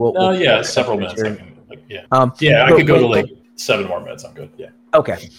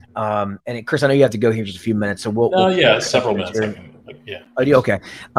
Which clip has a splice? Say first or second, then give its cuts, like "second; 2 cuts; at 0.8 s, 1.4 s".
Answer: first; 2 cuts; at 2.1 s, 3.4 s